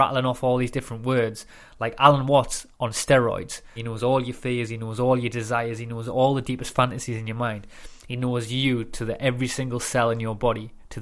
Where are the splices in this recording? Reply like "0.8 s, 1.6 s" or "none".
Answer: 3.8 s